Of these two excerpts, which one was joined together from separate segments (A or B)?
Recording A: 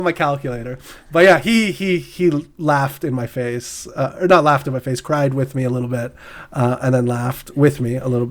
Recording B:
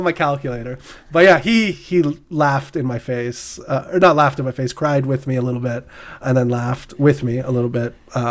B